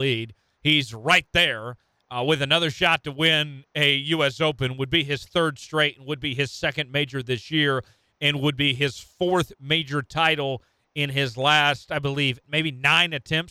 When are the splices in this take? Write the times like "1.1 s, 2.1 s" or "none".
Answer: 12.4 s

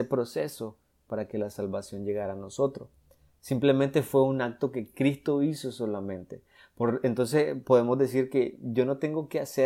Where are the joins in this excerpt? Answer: none

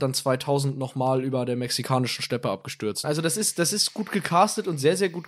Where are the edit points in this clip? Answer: 3.0 s

